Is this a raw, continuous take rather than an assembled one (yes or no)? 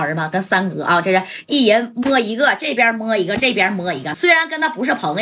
no